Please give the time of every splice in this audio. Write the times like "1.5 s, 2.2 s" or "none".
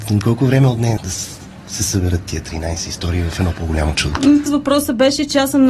1.0 s, 4.5 s